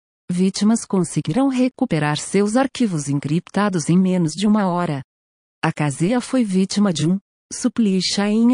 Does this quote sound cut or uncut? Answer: uncut